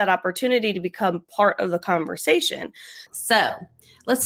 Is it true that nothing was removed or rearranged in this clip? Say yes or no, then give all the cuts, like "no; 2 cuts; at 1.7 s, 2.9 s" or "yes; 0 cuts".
no; 1 cut; at 3.1 s